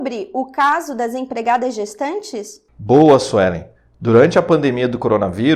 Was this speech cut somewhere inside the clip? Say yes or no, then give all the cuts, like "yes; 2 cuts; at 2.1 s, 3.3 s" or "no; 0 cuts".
no; 0 cuts